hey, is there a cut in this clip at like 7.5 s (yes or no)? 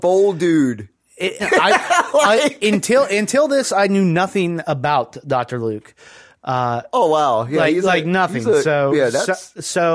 no